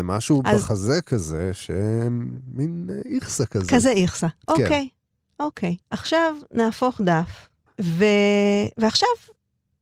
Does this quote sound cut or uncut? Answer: cut